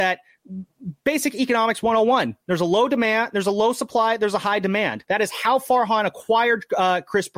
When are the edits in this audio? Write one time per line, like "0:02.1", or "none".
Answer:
0:05.0